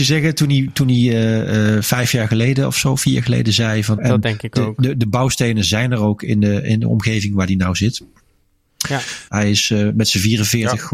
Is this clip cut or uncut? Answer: cut